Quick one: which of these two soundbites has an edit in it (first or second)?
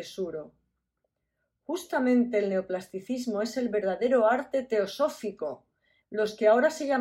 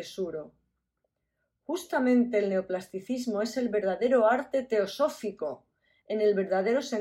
first